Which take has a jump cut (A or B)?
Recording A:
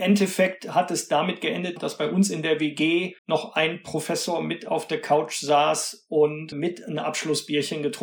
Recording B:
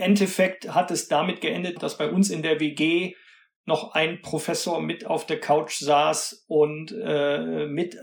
A